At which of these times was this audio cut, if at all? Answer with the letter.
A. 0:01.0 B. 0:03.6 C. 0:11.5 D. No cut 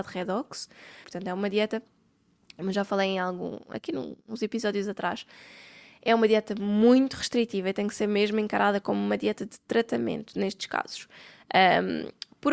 A